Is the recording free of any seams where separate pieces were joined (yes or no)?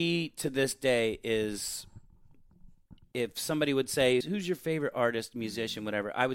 no